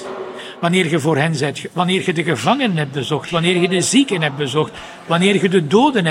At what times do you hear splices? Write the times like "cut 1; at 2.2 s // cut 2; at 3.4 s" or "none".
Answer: none